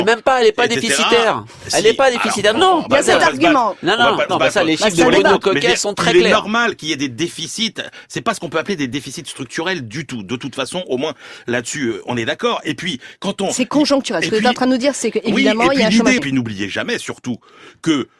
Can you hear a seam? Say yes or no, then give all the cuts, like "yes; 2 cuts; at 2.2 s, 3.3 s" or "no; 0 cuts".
yes; 2 cuts; at 4.3 s, 16.2 s